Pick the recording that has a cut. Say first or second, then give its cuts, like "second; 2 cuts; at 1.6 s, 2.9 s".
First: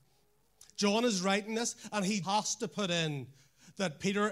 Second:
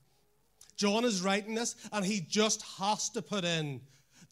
first; 1 cut; at 2.2 s